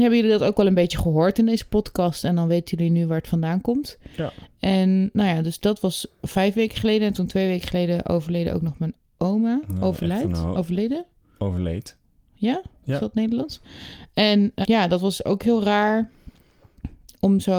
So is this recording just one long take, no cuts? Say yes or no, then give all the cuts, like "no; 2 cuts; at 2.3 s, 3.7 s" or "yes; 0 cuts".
no; 1 cut; at 14.6 s